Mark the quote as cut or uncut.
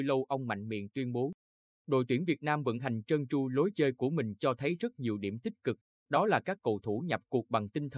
uncut